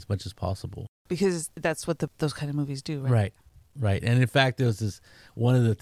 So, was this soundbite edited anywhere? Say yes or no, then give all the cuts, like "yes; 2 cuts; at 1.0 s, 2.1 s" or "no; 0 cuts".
yes; 1 cut; at 1.0 s